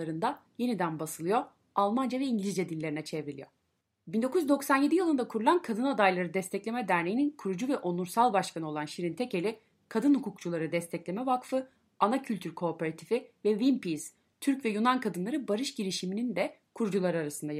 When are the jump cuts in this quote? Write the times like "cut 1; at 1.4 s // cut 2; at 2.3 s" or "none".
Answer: none